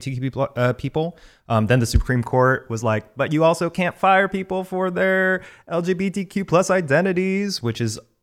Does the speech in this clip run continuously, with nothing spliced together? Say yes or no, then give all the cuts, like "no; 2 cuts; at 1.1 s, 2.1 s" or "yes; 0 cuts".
yes; 0 cuts